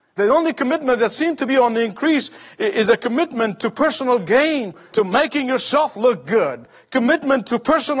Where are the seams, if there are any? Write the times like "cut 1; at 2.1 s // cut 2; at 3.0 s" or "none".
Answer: cut 1; at 4.9 s